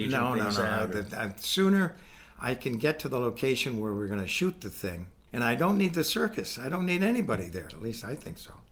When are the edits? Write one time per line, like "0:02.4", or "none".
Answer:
0:07.7